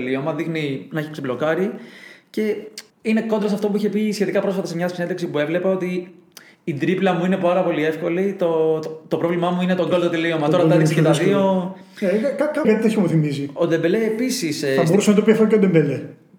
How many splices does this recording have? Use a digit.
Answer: 2